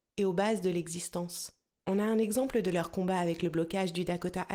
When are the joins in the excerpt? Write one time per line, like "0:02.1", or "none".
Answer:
0:01.8